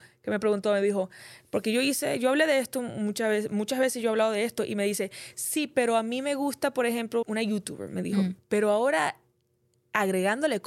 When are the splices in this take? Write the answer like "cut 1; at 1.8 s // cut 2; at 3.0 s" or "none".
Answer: cut 1; at 7.2 s // cut 2; at 8.4 s